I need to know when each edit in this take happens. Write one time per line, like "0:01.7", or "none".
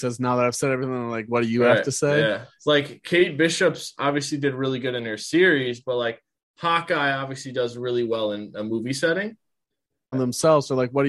0:02.6
0:10.1